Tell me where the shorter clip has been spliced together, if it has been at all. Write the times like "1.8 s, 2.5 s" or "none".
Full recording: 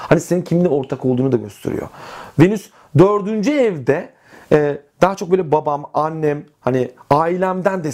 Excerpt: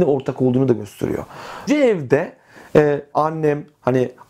1.7 s, 3.1 s